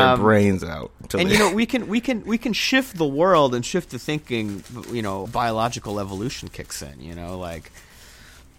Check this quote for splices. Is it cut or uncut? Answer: cut